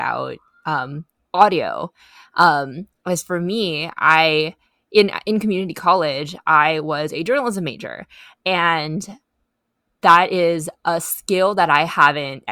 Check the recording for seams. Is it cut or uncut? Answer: uncut